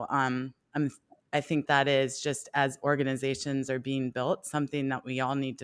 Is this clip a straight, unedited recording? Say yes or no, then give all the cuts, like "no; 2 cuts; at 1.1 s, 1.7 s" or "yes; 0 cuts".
no; 1 cut; at 1.7 s